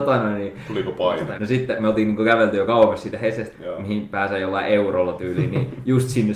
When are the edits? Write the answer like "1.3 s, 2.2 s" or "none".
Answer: 1.4 s, 3.5 s